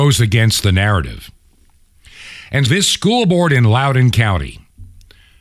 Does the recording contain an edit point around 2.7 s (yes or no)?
yes